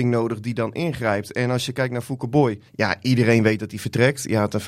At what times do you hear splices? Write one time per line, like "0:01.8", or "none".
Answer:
0:02.7